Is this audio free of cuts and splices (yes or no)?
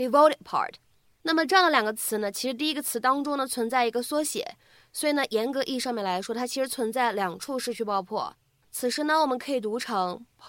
no